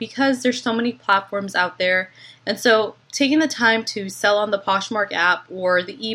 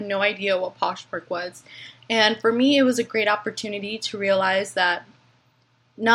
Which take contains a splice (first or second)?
first